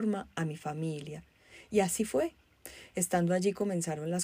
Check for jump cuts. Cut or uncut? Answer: uncut